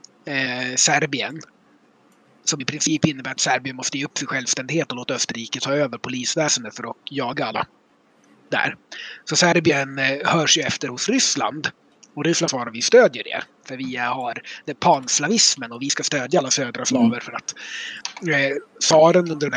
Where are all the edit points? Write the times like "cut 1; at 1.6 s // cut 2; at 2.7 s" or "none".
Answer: none